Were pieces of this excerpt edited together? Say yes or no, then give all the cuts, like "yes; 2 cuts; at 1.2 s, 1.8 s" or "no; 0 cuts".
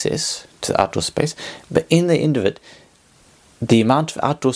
no; 0 cuts